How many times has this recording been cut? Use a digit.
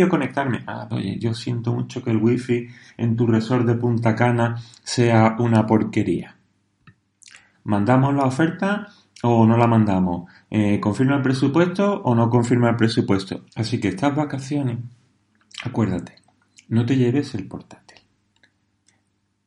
3